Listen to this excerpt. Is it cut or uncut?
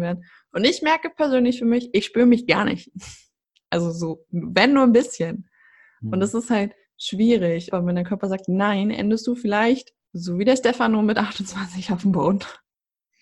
cut